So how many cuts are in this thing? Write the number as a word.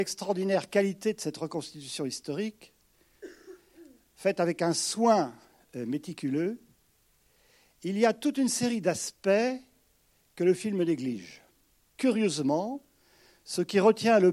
one